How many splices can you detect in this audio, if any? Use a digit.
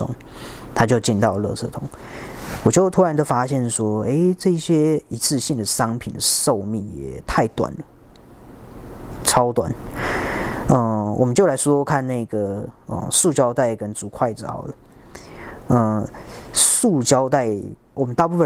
1